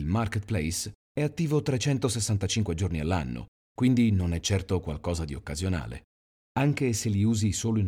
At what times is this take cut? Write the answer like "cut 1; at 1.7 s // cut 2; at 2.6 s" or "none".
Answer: none